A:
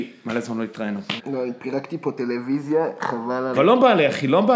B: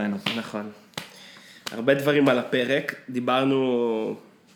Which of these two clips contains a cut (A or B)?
A